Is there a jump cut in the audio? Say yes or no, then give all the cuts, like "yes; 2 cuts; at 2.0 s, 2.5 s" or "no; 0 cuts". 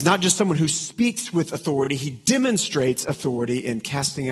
no; 0 cuts